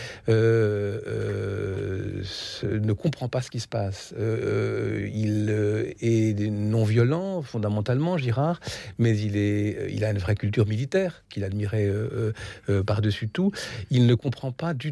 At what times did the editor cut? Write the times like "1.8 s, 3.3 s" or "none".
11.3 s